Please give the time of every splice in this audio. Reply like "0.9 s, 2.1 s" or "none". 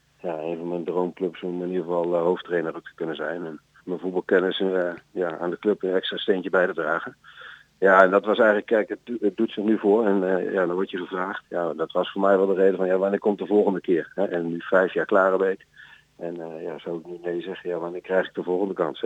3.8 s